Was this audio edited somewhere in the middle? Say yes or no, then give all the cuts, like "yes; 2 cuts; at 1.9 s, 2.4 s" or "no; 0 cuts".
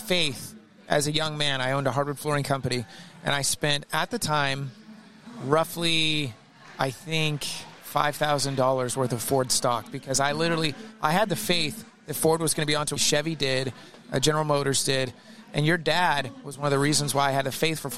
yes; 2 cuts; at 7.8 s, 13.0 s